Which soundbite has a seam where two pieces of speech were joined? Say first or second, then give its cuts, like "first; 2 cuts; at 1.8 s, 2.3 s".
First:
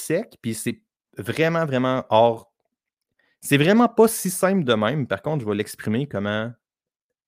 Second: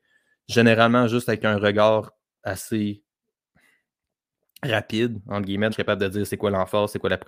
second; 1 cut; at 5.7 s